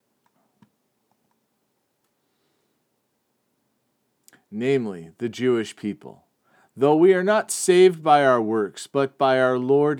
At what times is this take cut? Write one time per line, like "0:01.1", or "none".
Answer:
none